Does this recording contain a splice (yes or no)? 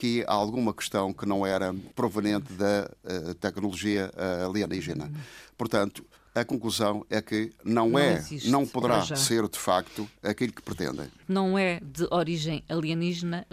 no